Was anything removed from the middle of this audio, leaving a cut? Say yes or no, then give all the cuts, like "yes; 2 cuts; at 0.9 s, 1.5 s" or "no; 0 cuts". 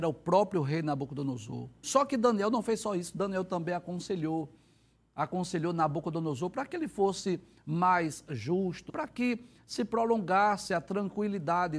yes; 2 cuts; at 1.8 s, 8.9 s